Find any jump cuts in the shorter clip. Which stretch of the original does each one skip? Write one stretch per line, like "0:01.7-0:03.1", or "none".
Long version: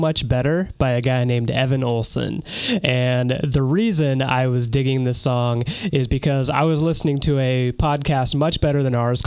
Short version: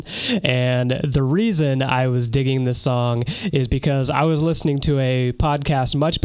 none